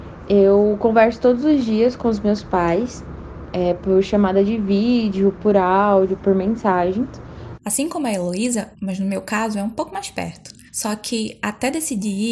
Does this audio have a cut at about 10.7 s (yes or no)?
yes